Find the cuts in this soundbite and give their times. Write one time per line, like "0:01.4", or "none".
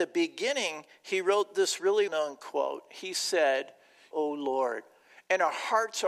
0:02.1
0:04.1